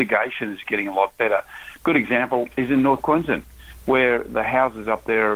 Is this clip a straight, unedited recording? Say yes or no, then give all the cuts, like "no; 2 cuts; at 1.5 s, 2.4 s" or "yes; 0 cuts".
no; 1 cut; at 1.8 s